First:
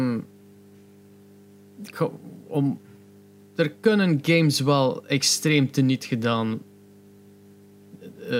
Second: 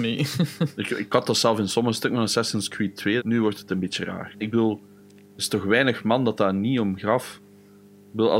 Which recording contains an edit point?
second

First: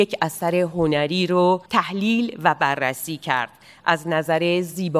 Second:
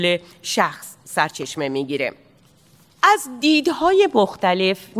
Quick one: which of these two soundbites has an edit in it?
first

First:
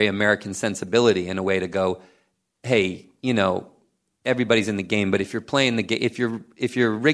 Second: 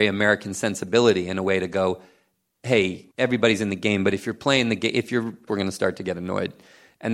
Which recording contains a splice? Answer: second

